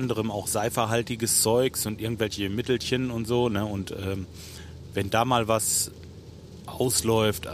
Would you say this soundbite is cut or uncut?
uncut